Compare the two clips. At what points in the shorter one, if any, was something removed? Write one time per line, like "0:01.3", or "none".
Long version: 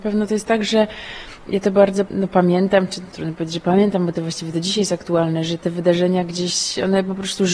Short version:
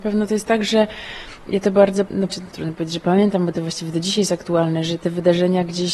0:02.3

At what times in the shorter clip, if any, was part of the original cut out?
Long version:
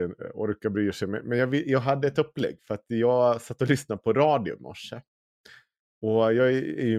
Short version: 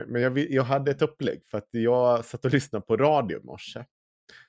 none

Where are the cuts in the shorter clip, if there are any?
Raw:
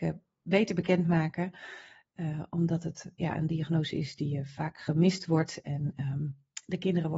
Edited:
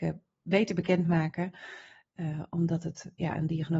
none

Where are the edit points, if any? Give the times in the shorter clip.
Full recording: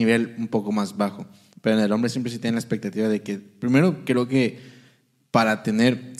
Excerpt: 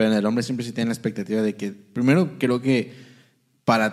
none

